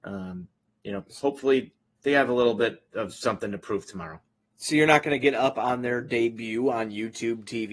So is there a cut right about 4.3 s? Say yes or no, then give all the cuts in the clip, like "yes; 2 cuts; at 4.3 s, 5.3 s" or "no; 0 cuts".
no; 0 cuts